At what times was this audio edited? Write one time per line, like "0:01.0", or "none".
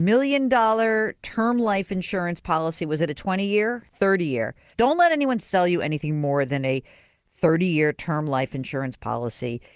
0:04.7

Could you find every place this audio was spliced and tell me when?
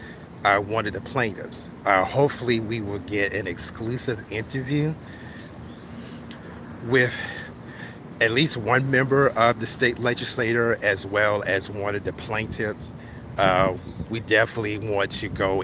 none

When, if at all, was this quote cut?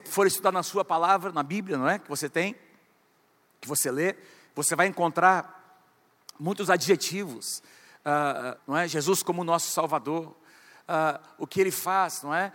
0:08.6

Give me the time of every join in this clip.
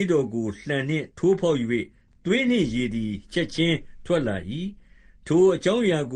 0:01.1

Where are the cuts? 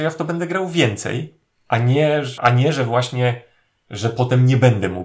0:02.4

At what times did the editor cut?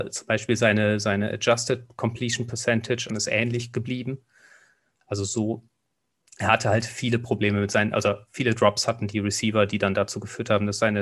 0:03.1

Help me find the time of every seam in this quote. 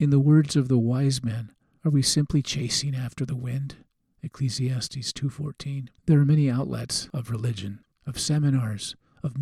0:06.0
0:07.9

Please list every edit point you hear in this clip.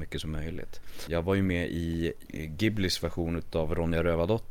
0:01.1
0:02.3

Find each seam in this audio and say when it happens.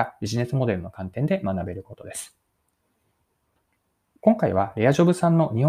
0:04.2

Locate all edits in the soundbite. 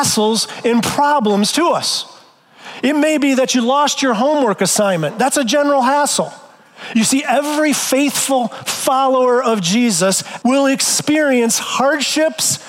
0:06.9
0:10.4

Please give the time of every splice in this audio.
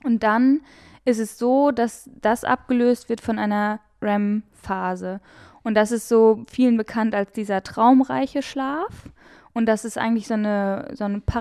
none

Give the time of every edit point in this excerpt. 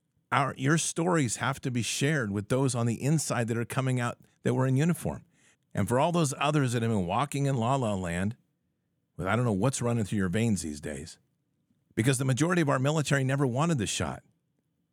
0:05.5
0:11.9

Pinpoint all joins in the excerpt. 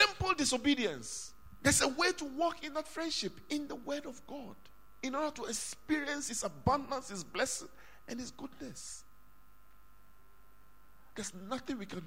0:01.6
0:11.1

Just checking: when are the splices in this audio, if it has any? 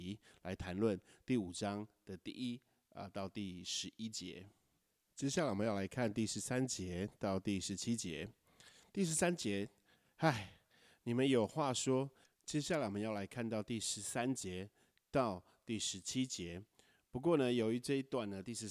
0:12.2

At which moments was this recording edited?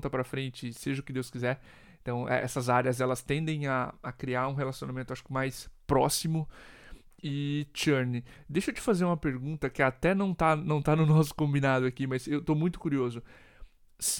none

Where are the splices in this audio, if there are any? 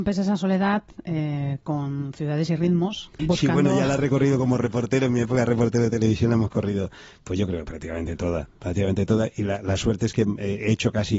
0:03.2

